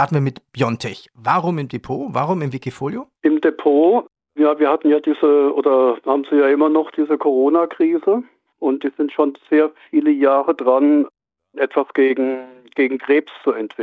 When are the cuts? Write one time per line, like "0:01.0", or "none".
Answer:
0:03.2
0:08.5

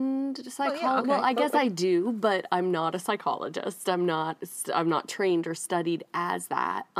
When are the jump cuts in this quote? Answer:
none

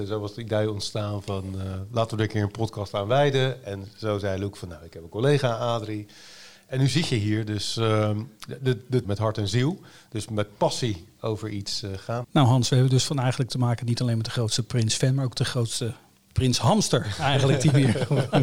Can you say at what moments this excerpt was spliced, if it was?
0:09.0
0:12.2

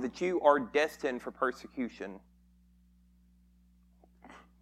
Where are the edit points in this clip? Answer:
none

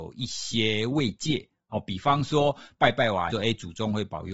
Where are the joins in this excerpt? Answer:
0:03.3

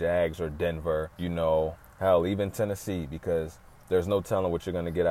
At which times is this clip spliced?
0:01.1

